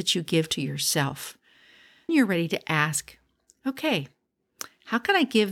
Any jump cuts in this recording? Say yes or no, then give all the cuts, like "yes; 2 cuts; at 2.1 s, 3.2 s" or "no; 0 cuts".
yes; 1 cut; at 2.1 s